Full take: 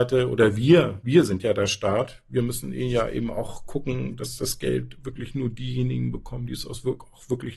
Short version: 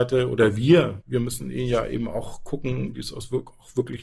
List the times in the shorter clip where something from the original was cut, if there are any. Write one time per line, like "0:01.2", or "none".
0:01.0
0:02.9

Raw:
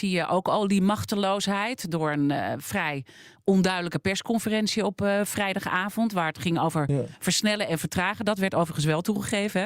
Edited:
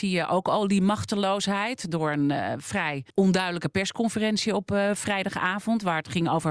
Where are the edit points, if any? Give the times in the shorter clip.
0:03.1

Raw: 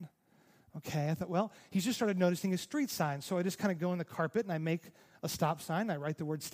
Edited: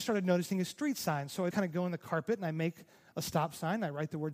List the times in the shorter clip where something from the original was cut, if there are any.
0:01.5

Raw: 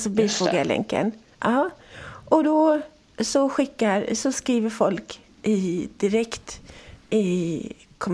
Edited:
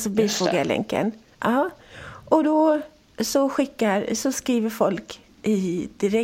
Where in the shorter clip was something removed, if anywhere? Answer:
none

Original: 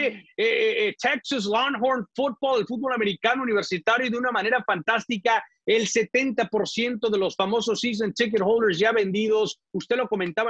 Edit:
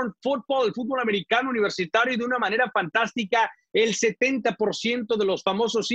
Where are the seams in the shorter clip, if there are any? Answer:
none

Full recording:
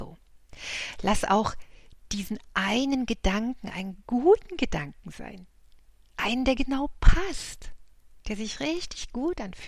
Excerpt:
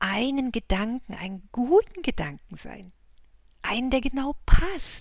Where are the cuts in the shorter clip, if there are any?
none

